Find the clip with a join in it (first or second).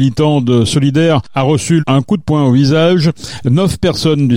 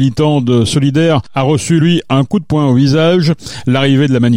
first